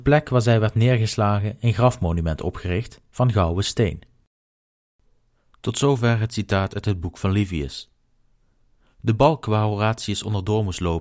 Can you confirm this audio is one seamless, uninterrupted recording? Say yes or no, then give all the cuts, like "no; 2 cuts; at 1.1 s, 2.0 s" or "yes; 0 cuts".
yes; 0 cuts